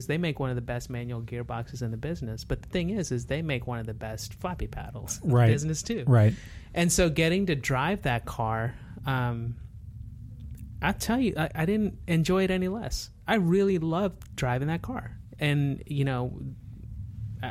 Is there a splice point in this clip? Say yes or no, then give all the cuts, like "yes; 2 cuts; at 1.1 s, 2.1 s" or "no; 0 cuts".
no; 0 cuts